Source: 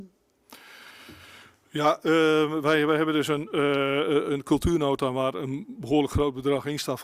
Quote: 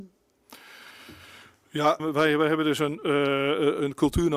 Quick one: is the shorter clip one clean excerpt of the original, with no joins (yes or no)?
no